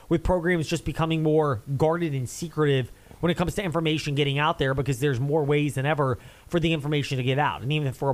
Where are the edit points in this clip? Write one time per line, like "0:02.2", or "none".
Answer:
none